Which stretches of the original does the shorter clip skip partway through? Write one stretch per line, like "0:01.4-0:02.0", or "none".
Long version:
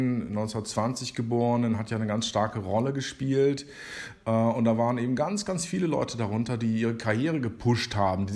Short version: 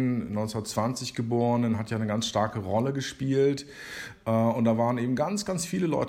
none